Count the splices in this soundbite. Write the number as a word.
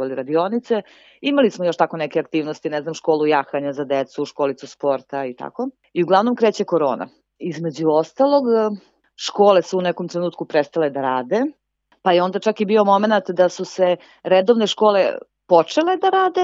zero